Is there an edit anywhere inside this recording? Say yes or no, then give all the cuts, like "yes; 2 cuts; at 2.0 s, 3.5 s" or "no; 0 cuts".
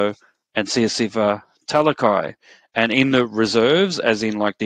no; 0 cuts